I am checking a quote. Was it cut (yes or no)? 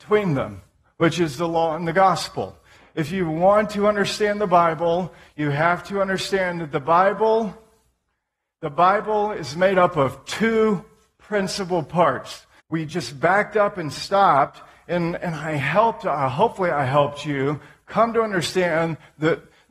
yes